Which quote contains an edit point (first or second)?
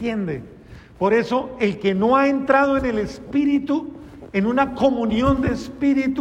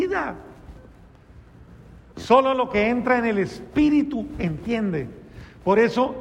second